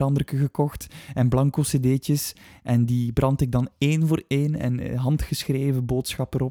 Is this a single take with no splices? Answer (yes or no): yes